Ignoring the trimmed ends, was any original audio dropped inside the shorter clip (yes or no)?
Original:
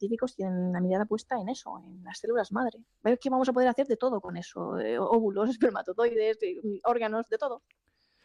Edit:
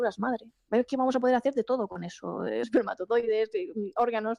yes